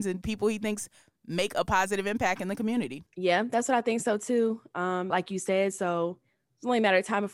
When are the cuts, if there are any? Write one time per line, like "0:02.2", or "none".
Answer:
0:05.1